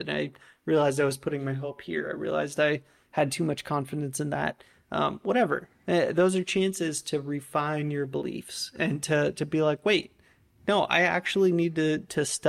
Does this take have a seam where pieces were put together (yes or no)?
no